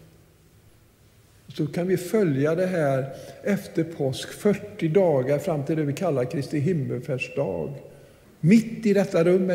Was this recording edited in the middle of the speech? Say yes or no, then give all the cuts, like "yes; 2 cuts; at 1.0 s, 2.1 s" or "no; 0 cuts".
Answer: yes; 1 cut; at 8.2 s